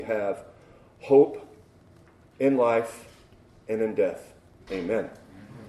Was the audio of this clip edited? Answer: yes; 1 cut; at 4.7 s

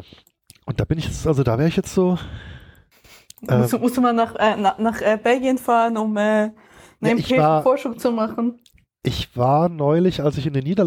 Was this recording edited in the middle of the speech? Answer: no; 0 cuts

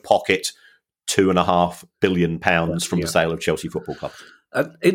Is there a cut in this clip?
no; 0 cuts

